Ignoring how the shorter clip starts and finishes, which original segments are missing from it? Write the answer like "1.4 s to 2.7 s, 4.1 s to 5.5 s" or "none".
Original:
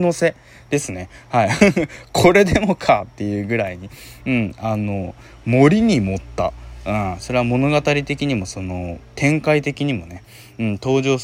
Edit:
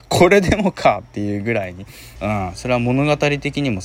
4.2 s to 6.8 s